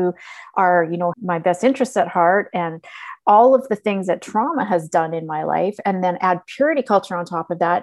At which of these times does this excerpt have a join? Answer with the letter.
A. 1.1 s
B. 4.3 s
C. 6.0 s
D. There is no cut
A